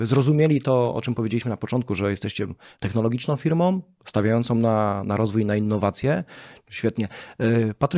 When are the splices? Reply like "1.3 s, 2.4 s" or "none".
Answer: 2.7 s, 6.6 s